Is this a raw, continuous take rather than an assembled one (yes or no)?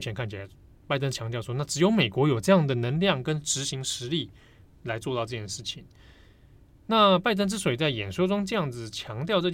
yes